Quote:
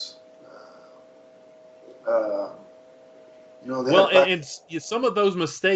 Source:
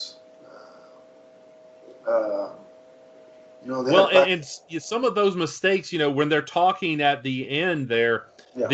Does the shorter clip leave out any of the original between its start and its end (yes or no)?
no